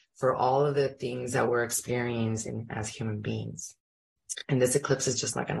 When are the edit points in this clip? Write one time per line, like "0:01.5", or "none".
none